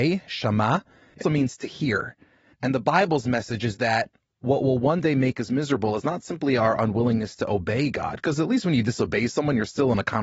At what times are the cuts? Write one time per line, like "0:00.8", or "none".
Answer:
0:01.2